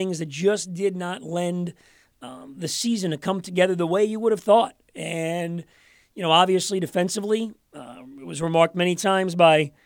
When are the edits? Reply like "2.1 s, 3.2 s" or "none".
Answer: none